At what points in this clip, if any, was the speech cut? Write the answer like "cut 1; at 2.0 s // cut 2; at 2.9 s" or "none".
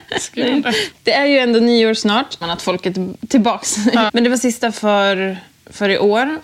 cut 1; at 0.9 s // cut 2; at 2.4 s // cut 3; at 4.1 s